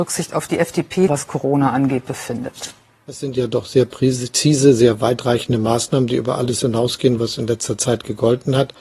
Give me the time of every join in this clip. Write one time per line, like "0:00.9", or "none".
0:01.1